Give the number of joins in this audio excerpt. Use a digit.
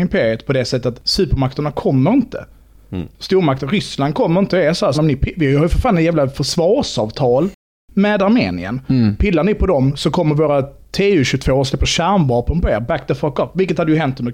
1